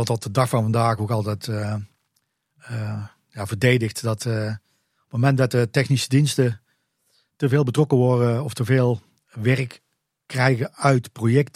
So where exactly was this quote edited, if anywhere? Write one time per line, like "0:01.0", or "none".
none

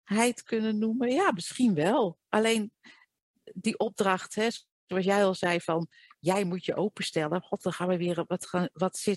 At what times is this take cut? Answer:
none

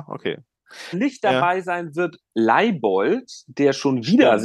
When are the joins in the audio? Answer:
0:00.9

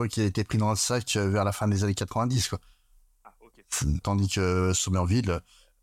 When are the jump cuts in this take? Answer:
0:04.0

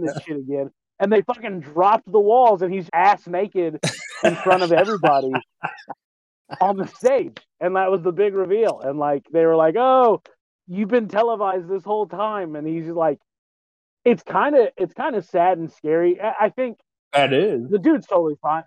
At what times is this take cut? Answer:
0:02.9

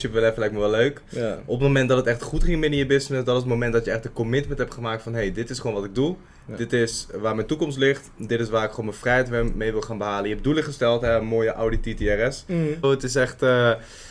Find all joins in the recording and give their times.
0:12.8

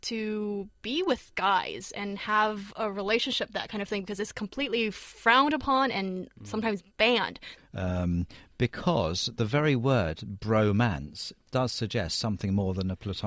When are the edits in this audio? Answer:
0:07.6
0:11.5

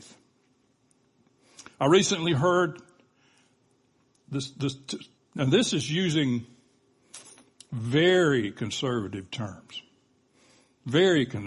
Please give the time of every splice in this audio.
0:05.2

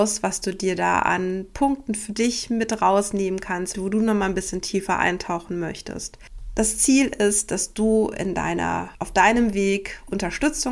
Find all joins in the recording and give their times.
0:03.7

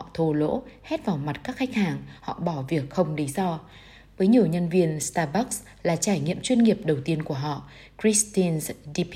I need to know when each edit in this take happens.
0:02.2

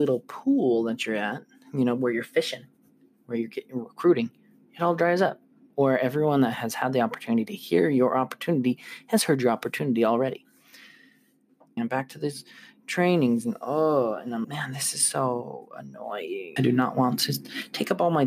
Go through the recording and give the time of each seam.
0:11.8
0:14.4
0:16.6

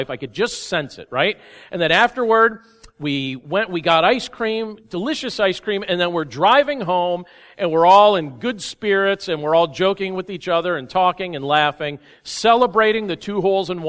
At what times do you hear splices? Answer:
none

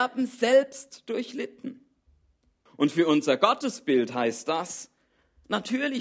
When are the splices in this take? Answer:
0:02.7

